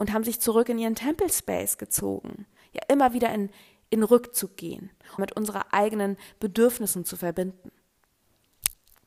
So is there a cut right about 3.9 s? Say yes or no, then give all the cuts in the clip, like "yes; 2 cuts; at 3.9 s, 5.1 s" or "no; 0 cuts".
no; 2 cuts; at 2.6 s, 5.2 s